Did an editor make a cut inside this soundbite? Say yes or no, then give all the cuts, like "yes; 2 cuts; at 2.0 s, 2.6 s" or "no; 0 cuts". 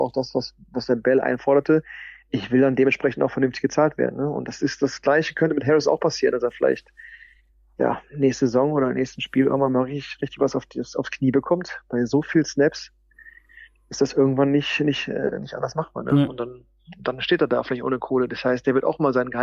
no; 0 cuts